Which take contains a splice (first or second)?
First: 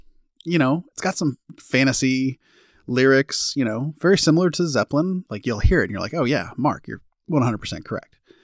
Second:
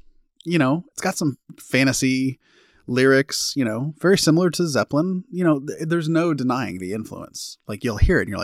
first